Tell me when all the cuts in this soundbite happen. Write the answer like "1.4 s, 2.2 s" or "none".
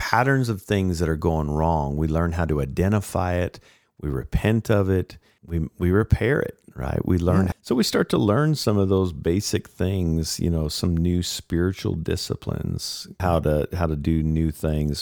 5.4 s, 7.5 s, 13.2 s